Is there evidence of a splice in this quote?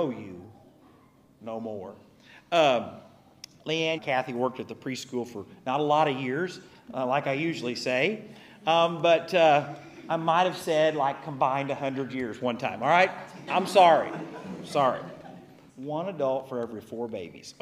yes; 3 cuts; at 4.0 s, 13.5 s, 15.7 s

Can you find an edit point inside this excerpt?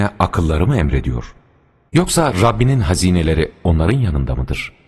yes; 1 cut; at 1.9 s

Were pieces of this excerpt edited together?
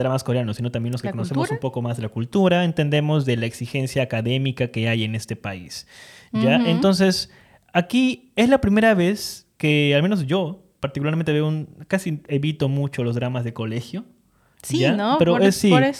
no; 0 cuts

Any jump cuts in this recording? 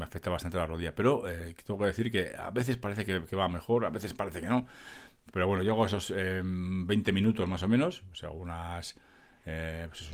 no; 0 cuts

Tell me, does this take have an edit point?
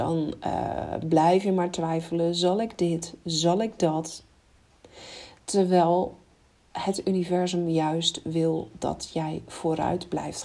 no; 0 cuts

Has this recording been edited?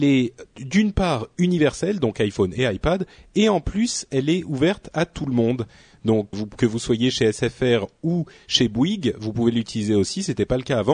yes; 1 cut; at 6.3 s

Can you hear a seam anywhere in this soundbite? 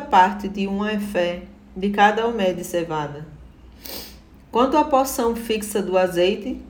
no; 0 cuts

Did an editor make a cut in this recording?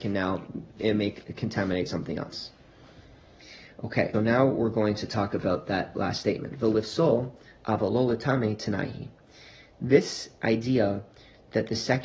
yes; 1 cut; at 4.1 s

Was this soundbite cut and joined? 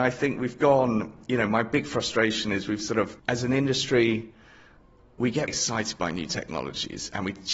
yes; 2 cuts; at 3.2 s, 5.5 s

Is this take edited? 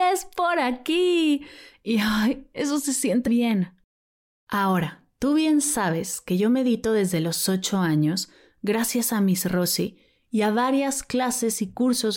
yes; 1 cut; at 3.3 s

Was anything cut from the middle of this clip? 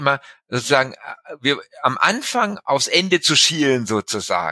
no; 0 cuts

